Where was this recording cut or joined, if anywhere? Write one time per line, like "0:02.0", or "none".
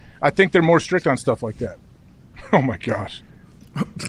none